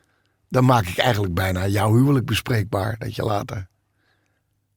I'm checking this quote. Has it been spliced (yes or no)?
no